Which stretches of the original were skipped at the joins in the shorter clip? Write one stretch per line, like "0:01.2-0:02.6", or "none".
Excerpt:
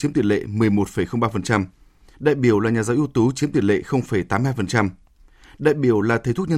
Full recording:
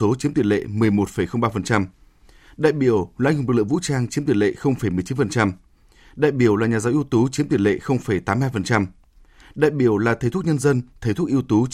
0:02.3-0:06.1

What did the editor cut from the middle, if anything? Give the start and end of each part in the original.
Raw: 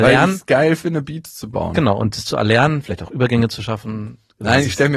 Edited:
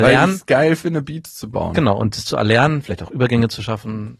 none

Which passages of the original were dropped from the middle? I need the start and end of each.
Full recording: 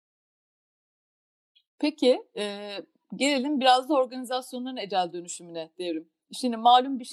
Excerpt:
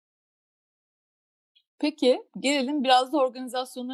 0:02.3-0:03.0

